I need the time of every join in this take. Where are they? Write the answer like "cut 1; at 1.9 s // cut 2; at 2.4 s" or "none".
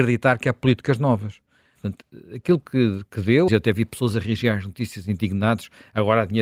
cut 1; at 1.8 s // cut 2; at 3.5 s